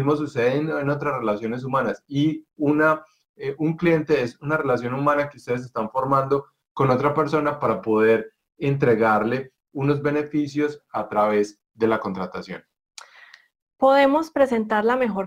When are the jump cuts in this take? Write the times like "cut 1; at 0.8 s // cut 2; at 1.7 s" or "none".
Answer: none